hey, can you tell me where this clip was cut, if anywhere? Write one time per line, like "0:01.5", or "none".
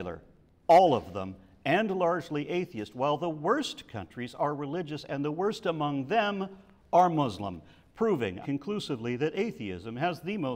0:08.4